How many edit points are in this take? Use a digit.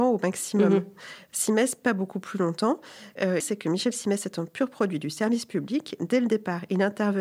1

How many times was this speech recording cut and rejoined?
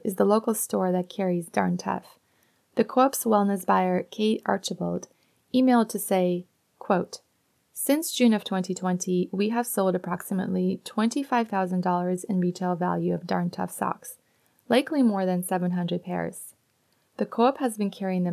0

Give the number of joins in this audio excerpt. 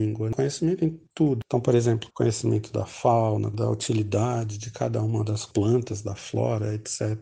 2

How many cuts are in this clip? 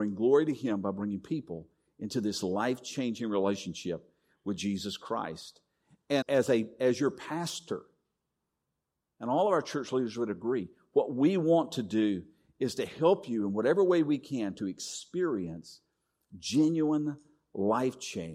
1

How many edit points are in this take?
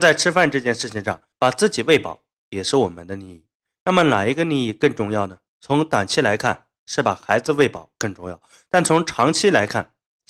2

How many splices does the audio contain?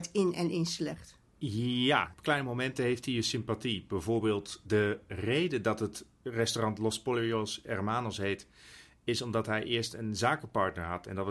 1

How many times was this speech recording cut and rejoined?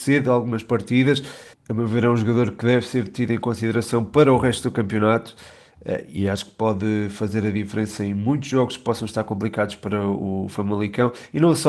1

